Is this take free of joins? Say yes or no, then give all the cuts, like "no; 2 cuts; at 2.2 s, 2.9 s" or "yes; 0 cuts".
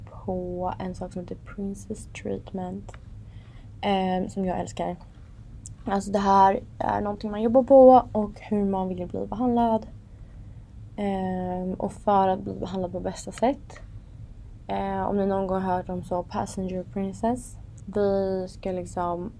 no; 1 cut; at 17.8 s